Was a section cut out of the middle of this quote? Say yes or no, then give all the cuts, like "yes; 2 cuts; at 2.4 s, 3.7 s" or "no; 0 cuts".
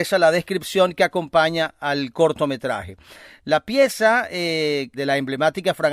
yes; 1 cut; at 4.9 s